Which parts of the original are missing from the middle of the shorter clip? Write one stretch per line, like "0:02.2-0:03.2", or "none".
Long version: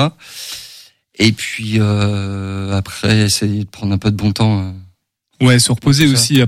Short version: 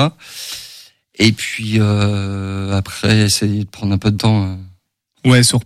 0:04.2-0:04.3